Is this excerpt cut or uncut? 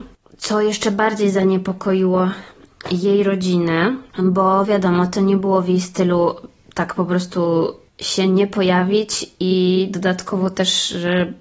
uncut